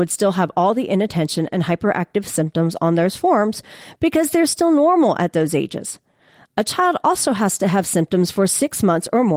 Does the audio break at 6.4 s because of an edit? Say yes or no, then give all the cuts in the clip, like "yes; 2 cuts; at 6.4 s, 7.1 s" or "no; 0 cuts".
no; 0 cuts